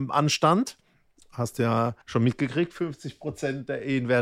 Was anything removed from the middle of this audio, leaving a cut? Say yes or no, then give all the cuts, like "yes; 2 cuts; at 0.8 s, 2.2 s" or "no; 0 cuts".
yes; 1 cut; at 2.0 s